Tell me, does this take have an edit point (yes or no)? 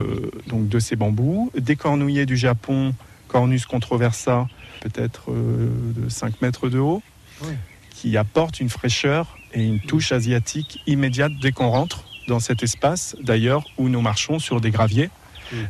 no